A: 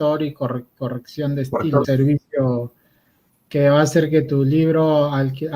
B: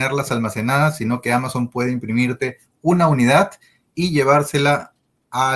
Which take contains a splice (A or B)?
A